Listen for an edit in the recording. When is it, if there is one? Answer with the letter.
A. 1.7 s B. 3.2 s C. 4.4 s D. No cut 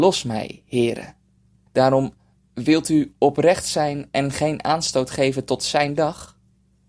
A